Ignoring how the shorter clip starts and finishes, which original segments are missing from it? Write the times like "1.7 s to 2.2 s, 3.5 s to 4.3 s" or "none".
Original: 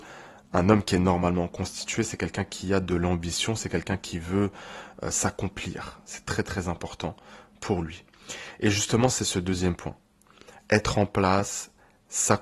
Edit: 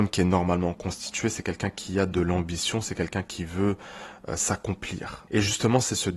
6.0 s to 8.6 s